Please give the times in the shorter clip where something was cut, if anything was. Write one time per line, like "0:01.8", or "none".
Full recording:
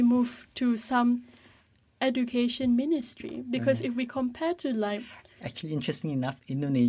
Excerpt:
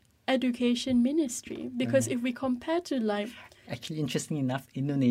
none

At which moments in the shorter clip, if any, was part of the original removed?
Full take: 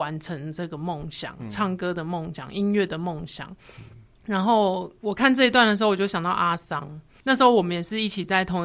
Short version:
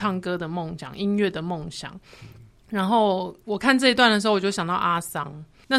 none

